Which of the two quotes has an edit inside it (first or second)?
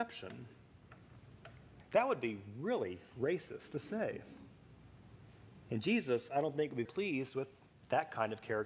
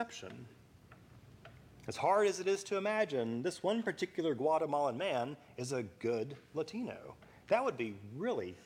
first